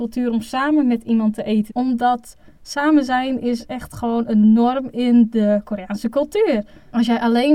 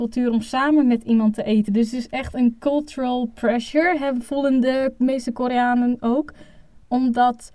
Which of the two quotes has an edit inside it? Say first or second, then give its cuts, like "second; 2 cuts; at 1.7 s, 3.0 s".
first; 1 cut; at 1.7 s